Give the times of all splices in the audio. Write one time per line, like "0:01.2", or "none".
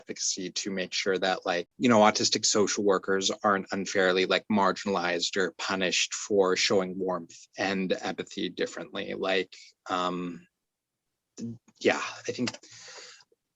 none